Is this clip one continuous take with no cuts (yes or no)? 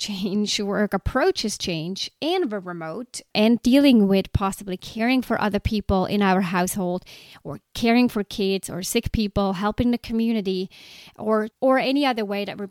yes